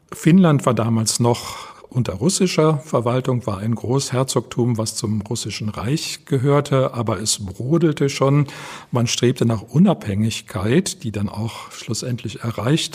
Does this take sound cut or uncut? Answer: uncut